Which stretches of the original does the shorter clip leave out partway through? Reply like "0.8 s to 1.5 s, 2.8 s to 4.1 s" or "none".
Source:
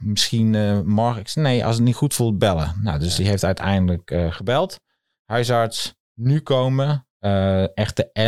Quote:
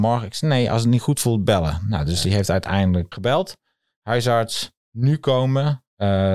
4.1 s to 4.3 s